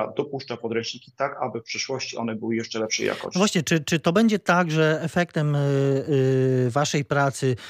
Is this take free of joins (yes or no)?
yes